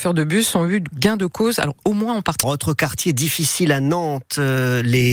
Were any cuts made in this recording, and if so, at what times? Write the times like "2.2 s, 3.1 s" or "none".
2.4 s